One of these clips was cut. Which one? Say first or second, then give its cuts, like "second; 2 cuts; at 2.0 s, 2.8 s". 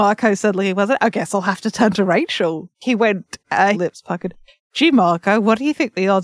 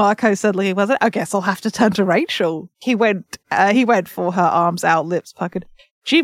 first; 1 cut; at 3.7 s